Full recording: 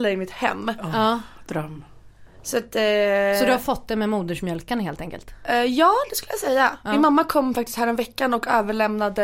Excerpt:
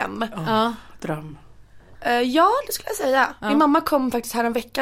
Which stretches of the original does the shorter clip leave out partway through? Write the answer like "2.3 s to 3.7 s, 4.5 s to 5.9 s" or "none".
2.4 s to 5.4 s